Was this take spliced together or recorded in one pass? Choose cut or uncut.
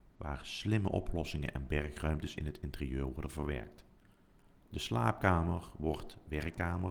cut